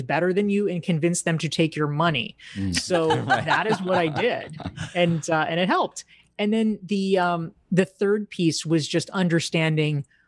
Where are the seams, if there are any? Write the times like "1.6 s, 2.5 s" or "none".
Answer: none